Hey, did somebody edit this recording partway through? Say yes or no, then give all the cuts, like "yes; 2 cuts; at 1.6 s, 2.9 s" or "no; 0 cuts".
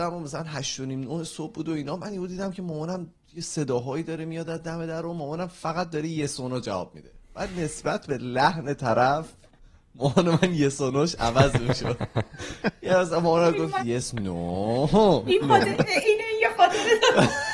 yes; 2 cuts; at 13.8 s, 15.4 s